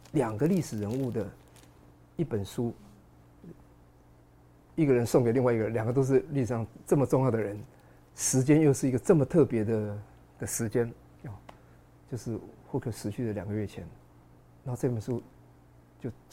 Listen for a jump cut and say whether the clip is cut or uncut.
uncut